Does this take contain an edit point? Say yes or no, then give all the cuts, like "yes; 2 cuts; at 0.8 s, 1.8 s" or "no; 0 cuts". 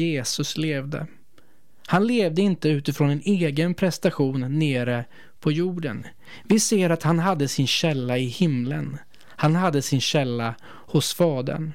no; 0 cuts